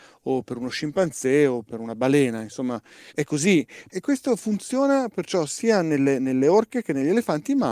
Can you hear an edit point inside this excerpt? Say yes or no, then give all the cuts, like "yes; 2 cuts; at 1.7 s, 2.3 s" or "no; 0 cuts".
yes; 1 cut; at 3.9 s